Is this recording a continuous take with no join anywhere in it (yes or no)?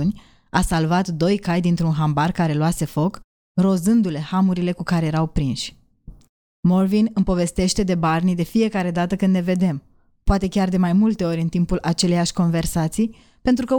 yes